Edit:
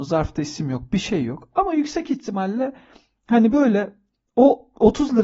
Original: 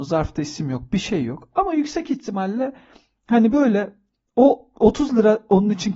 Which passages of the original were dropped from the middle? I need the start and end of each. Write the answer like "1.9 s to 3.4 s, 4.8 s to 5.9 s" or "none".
none